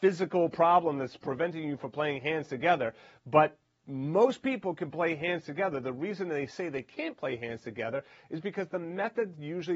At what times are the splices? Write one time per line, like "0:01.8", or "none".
none